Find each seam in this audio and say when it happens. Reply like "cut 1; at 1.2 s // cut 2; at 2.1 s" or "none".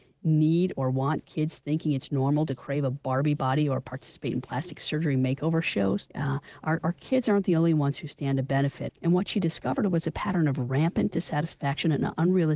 cut 1; at 6.1 s // cut 2; at 8.9 s